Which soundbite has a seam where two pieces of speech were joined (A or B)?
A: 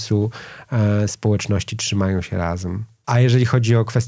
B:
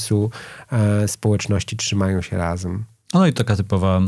A